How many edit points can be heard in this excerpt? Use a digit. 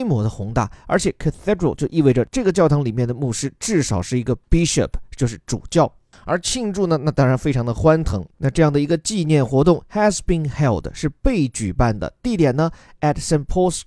2